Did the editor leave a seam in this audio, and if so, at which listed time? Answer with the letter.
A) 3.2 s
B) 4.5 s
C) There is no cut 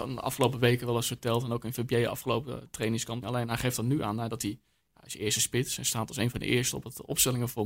A